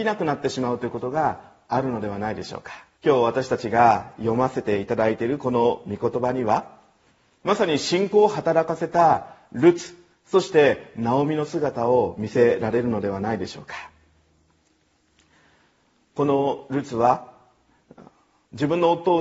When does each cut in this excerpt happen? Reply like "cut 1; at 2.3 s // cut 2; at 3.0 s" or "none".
cut 1; at 3.0 s